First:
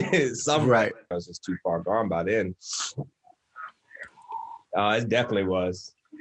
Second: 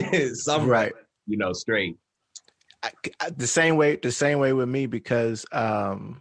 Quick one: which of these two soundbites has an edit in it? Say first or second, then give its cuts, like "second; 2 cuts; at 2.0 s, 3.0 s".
first; 2 cuts; at 1.1 s, 4.7 s